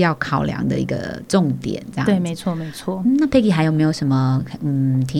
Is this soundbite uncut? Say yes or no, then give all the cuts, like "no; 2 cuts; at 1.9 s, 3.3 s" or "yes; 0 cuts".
yes; 0 cuts